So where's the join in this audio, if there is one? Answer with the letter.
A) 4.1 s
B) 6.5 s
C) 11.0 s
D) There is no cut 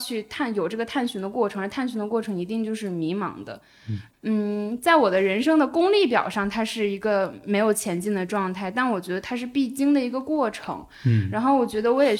A